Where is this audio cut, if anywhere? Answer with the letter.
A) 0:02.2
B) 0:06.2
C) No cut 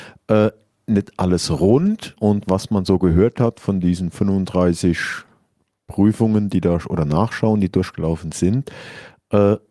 A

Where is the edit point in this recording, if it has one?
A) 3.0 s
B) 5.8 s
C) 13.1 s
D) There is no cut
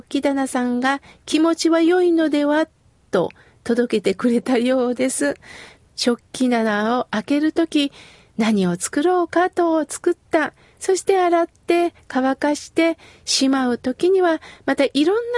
B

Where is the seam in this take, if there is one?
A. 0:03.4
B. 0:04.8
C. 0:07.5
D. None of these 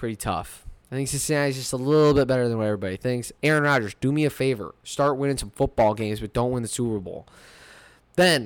A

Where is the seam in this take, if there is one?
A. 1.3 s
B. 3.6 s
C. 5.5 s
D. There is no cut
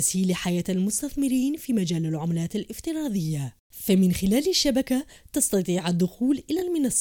B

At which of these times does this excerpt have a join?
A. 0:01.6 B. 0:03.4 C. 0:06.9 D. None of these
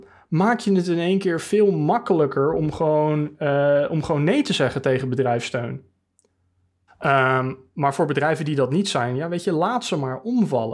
C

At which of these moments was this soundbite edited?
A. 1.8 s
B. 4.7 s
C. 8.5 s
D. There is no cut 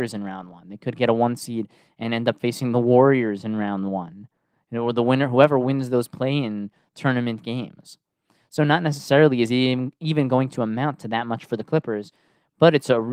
D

